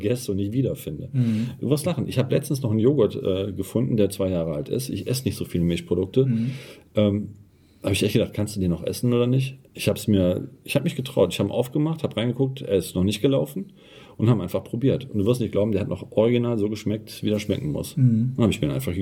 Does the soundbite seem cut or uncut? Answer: uncut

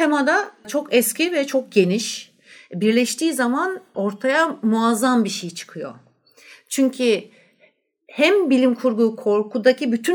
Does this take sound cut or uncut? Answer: uncut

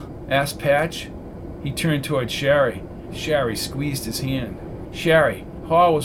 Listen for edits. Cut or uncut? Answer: cut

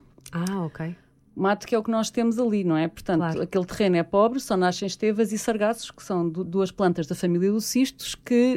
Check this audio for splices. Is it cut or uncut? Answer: uncut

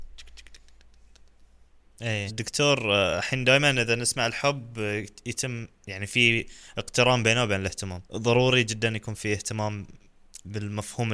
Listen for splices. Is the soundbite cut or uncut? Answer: cut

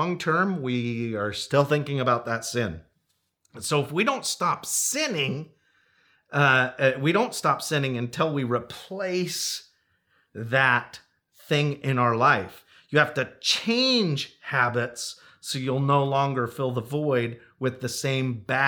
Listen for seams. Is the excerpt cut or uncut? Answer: uncut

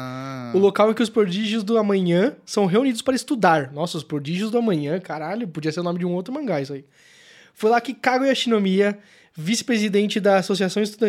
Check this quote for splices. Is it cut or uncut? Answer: uncut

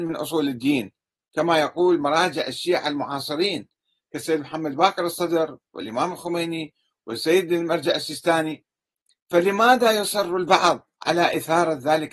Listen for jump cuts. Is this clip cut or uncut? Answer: cut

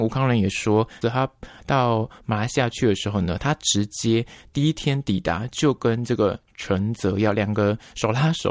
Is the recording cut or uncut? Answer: cut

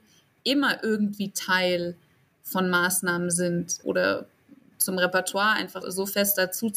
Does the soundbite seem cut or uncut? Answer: cut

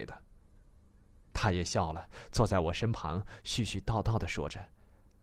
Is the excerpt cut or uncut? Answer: uncut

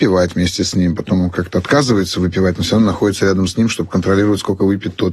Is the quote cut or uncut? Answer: uncut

